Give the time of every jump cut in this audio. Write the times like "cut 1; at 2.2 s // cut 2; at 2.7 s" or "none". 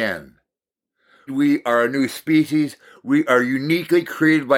cut 1; at 1.3 s